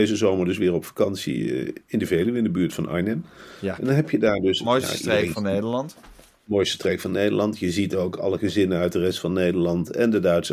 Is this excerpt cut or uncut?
uncut